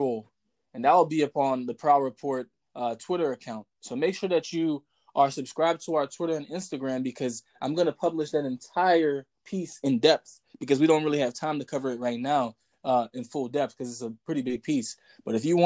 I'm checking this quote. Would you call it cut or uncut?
uncut